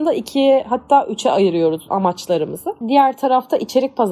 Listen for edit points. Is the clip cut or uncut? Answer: cut